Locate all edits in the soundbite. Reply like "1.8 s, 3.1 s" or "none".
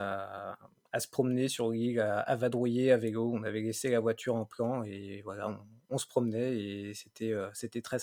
none